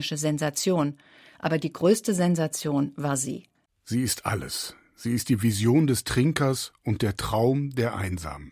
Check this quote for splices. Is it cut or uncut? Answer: cut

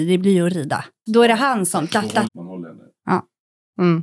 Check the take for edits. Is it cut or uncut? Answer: cut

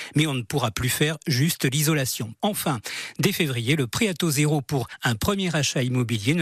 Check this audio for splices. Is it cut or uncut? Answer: cut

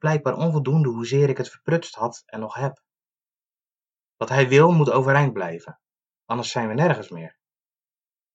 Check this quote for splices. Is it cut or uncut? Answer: cut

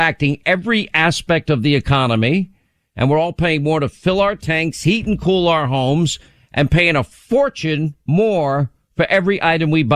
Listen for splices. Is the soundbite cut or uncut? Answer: uncut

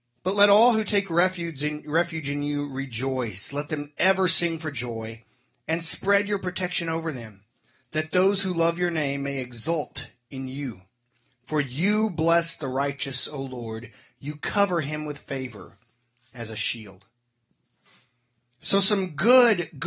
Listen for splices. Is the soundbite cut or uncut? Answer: uncut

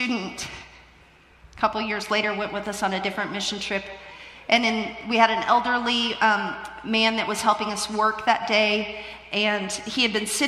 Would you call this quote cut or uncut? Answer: uncut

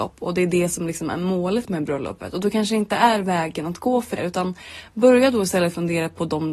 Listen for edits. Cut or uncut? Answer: cut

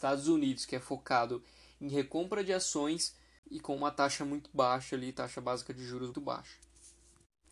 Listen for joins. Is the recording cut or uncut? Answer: cut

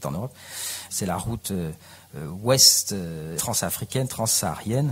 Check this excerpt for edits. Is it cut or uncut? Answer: cut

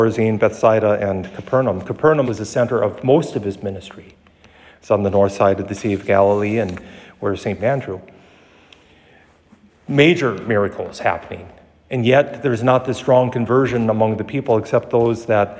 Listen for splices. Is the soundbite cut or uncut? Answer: cut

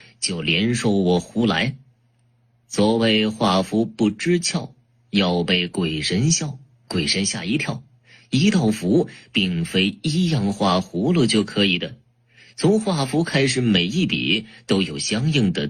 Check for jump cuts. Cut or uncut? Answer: cut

